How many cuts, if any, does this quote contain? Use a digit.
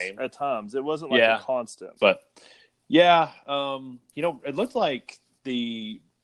2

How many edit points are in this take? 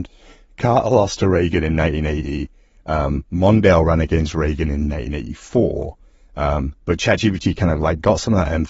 0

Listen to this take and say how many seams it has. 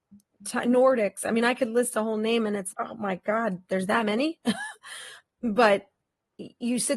2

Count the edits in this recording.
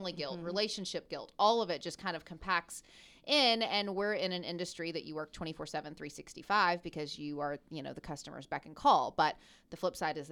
0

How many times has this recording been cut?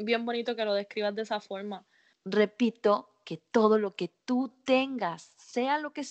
1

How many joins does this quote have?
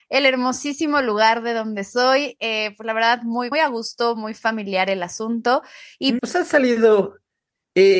2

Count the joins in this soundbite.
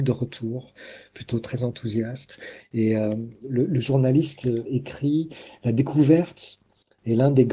1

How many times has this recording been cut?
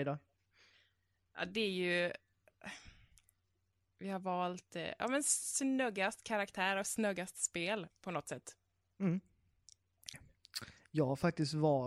2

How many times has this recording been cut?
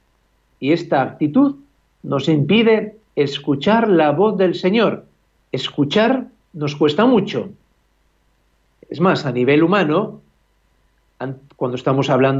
1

